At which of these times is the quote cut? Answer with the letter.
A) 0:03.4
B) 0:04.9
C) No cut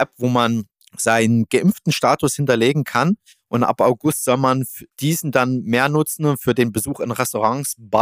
B